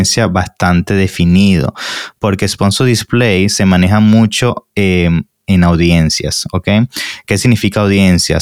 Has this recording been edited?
no; 0 cuts

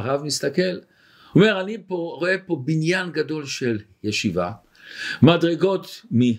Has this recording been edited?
no; 0 cuts

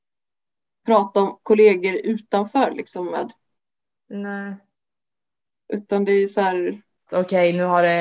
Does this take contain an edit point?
yes; 1 cut; at 7.1 s

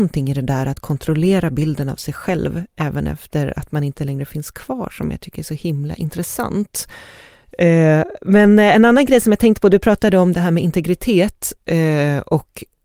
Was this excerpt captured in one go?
no; 1 cut; at 7.5 s

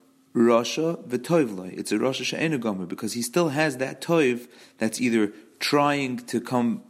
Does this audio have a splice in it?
no; 0 cuts

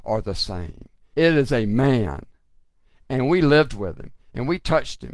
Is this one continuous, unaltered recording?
no; 1 cut; at 1.1 s

